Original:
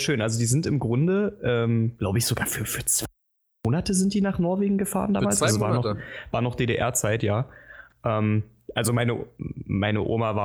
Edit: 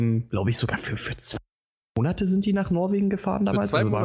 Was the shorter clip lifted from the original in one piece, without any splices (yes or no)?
yes